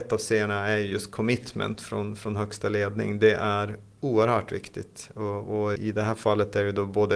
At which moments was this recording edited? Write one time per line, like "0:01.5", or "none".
0:05.8

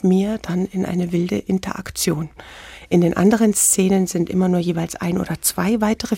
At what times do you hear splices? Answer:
none

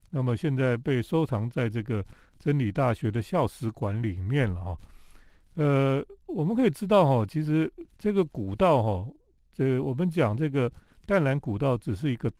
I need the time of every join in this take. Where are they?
0:07.9

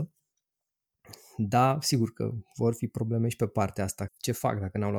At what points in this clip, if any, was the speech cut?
0:04.1

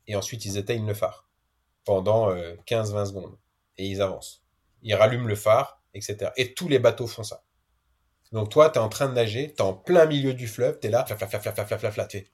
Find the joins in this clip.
0:11.1

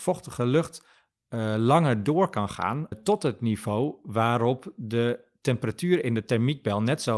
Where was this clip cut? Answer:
0:02.9

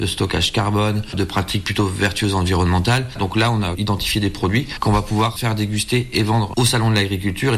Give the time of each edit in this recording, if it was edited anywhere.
0:03.1

